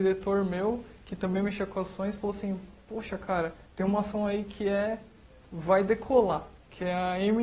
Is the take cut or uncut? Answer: uncut